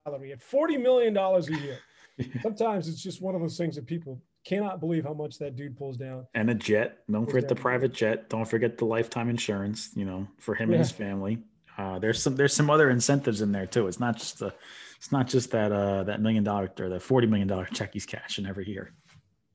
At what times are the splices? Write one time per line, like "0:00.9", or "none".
none